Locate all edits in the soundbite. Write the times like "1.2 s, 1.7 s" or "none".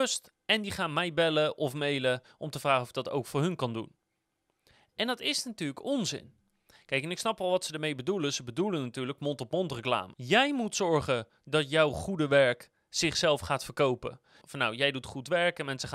10.1 s, 14.4 s